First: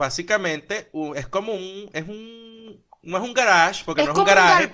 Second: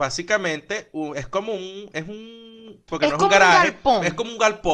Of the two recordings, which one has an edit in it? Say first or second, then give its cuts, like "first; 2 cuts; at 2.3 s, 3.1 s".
second; 1 cut; at 2.9 s